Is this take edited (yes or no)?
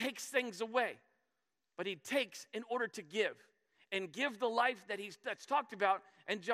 no